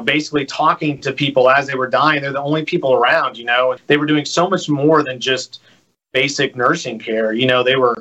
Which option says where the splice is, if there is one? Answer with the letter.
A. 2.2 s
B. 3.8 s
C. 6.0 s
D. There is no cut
B